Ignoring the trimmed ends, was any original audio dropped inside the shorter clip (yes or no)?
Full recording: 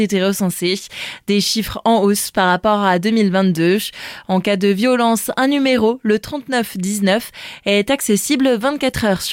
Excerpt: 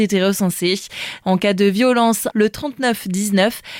yes